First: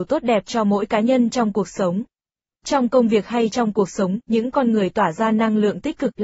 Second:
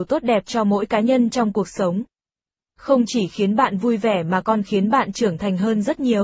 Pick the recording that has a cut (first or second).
first